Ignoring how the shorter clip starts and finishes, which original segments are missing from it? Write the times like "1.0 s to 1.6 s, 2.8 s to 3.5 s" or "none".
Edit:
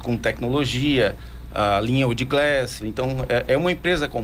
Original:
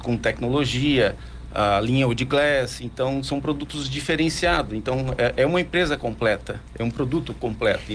2.8 s to 4.7 s